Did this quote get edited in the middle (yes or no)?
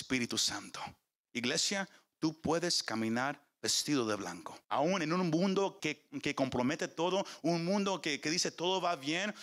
yes